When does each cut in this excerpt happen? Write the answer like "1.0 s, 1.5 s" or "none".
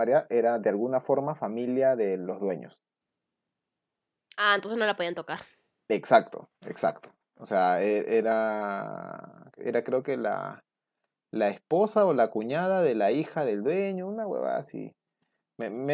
none